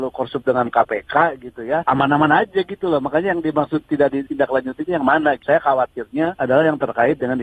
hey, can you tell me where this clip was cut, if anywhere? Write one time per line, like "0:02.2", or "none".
none